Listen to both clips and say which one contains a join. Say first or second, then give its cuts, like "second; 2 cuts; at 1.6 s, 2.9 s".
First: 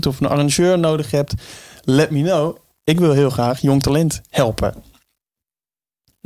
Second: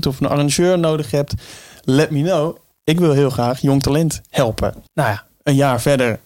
second; 1 cut; at 4.9 s